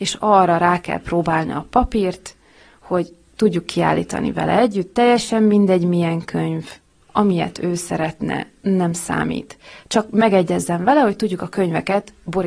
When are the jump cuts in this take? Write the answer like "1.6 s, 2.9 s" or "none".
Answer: none